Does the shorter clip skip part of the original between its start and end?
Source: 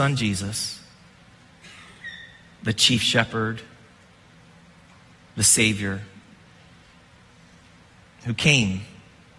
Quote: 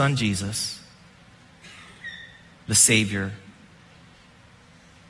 yes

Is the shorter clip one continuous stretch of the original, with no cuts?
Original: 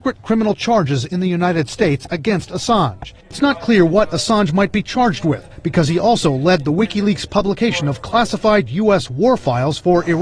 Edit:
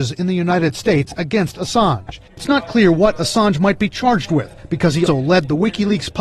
no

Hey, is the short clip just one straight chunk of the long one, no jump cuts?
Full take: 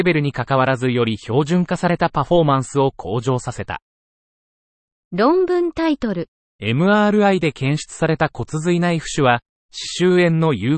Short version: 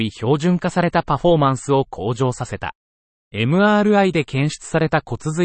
no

